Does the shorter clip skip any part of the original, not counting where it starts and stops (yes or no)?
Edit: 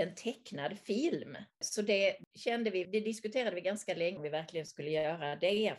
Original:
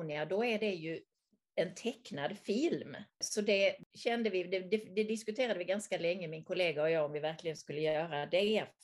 yes